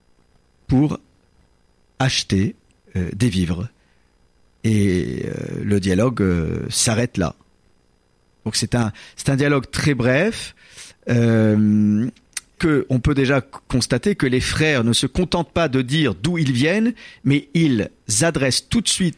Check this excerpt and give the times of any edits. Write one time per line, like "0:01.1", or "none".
0:12.6